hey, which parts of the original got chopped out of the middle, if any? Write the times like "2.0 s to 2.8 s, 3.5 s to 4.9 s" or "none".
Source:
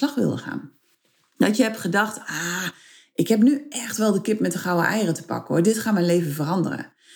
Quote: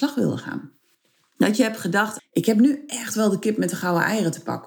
2.2 s to 3.0 s